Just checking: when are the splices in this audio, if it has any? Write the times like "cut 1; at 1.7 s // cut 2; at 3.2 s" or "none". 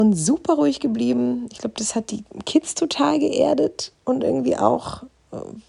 none